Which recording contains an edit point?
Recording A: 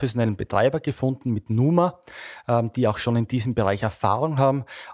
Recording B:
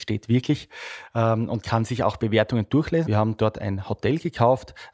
B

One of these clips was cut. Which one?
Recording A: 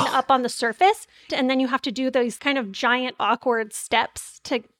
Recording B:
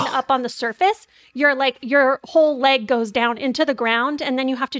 A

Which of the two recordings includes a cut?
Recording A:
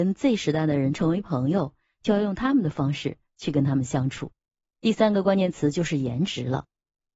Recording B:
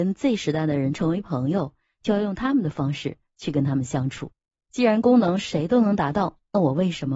B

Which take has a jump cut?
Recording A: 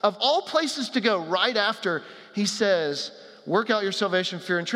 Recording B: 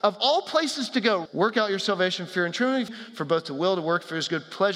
B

